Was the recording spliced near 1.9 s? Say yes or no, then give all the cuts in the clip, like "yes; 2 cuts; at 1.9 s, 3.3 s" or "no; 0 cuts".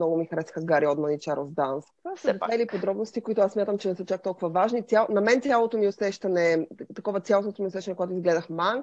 yes; 1 cut; at 1.9 s